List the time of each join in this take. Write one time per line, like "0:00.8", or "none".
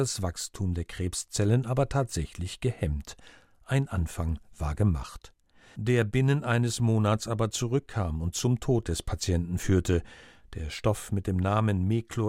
0:05.7